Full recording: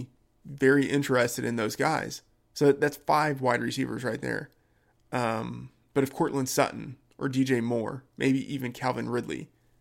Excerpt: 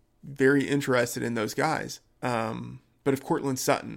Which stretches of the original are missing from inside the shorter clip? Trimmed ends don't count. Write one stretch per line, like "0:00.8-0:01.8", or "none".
0:02.4-0:05.1